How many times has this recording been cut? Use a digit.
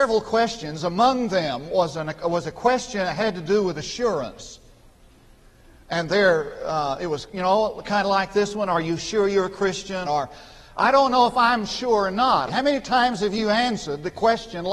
2